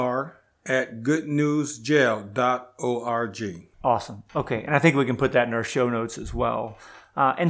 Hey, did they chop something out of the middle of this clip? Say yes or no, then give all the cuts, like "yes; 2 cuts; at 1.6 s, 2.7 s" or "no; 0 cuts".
yes; 1 cut; at 3.7 s